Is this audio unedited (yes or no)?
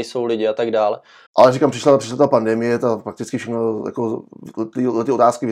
no